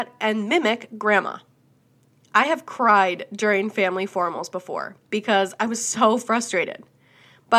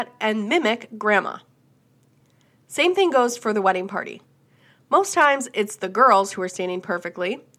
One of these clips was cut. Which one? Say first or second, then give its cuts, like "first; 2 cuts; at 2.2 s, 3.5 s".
first; 1 cut; at 2.2 s